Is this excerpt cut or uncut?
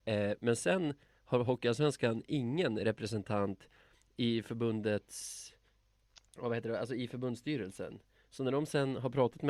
uncut